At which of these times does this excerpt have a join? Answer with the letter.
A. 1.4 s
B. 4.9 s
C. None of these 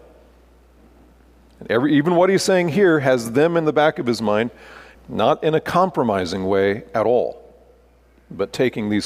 B